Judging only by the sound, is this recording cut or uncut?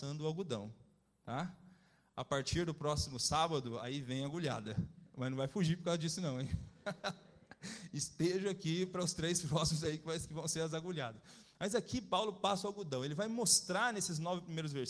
uncut